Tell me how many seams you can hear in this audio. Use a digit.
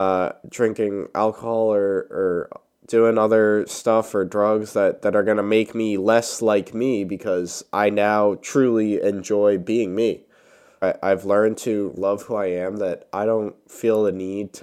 2